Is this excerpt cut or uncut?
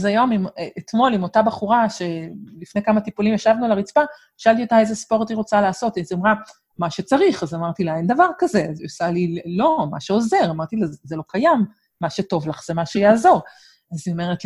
uncut